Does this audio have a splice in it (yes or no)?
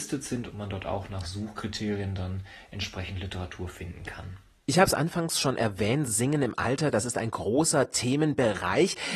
no